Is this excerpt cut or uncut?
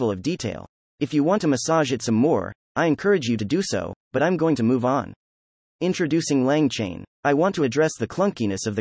uncut